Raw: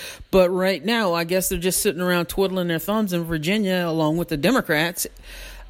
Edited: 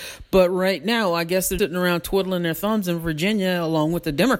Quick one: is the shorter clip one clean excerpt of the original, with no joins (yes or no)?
no